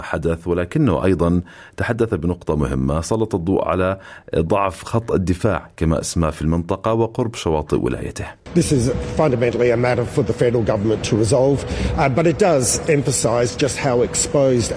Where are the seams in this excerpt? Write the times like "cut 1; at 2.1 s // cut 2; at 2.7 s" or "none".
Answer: none